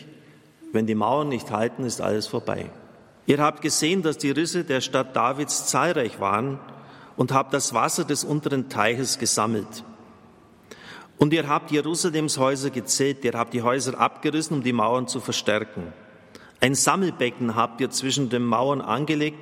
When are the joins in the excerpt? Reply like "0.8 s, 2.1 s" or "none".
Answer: 3.2 s

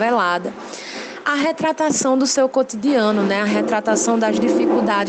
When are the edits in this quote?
none

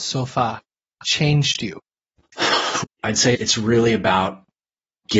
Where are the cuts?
2.8 s

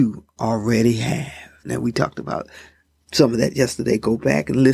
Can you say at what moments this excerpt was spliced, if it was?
1.6 s

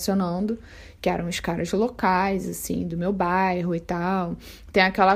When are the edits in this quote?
none

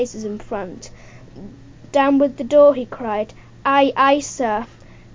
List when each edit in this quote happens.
1.9 s

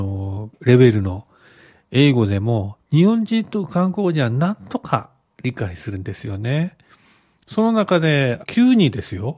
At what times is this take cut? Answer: 7.4 s, 8.4 s

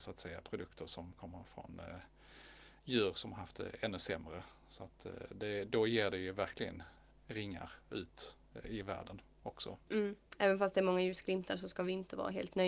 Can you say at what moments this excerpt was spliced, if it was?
10.3 s

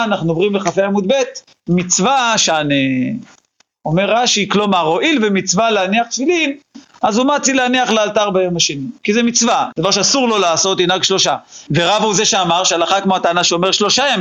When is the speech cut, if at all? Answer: 9.7 s, 11.7 s

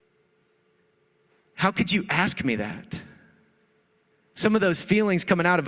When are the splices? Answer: none

